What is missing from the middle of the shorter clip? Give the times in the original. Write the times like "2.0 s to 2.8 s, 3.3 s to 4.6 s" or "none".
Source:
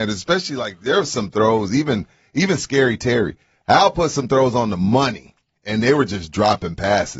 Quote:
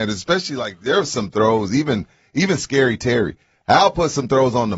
none